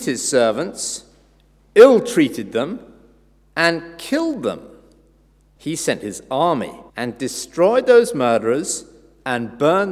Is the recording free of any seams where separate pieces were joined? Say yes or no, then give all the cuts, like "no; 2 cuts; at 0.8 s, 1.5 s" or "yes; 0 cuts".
no; 2 cuts; at 5.6 s, 6.9 s